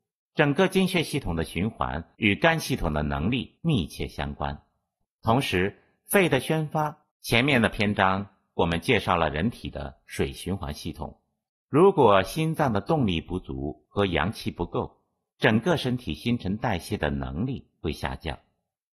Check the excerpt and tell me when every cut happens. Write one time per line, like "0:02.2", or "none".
0:07.1
0:11.5